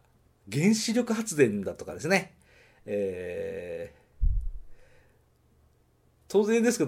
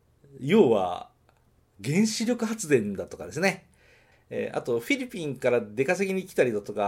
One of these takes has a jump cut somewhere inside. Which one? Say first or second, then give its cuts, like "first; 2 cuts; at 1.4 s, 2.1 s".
second; 1 cut; at 4.1 s